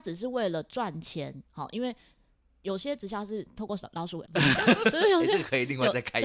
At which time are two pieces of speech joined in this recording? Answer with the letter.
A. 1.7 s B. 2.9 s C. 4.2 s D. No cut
C